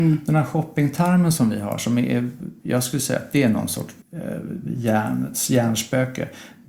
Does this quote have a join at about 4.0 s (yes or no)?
yes